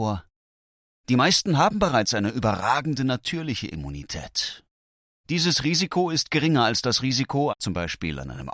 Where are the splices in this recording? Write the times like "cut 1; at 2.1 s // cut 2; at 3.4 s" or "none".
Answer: cut 1; at 5.2 s // cut 2; at 7.5 s